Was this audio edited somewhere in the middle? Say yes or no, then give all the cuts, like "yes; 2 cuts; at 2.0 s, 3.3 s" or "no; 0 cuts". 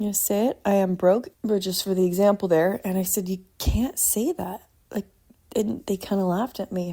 yes; 1 cut; at 1.3 s